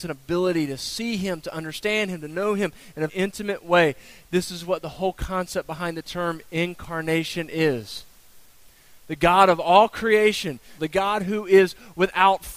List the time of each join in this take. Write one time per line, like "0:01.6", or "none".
0:03.1
0:10.8